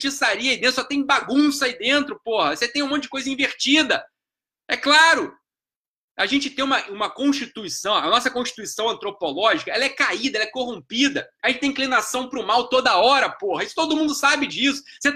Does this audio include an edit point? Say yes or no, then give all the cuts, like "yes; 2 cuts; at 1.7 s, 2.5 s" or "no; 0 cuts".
no; 0 cuts